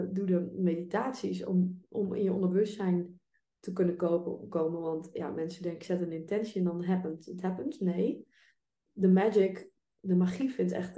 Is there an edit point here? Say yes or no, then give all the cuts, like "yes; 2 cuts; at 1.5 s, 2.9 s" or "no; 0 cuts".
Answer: no; 0 cuts